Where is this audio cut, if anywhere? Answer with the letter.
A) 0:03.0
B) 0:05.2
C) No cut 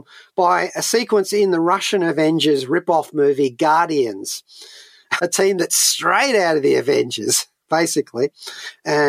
B